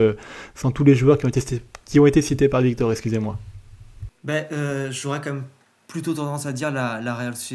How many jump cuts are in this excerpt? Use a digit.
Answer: 0